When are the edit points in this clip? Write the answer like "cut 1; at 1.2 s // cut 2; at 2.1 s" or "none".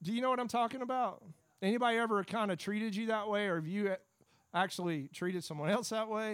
none